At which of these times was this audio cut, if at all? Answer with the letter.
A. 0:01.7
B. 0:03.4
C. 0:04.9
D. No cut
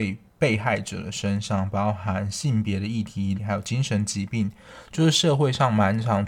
B